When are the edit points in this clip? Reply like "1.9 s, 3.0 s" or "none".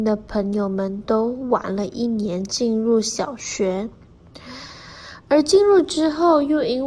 none